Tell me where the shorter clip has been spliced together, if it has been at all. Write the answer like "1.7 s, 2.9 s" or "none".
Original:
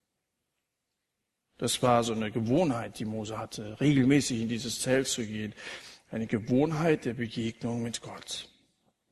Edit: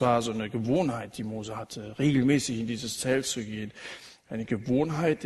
none